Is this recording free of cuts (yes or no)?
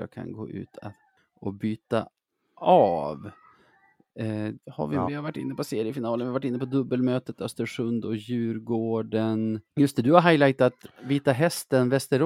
no